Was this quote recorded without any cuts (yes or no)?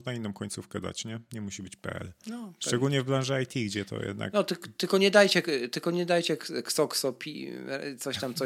yes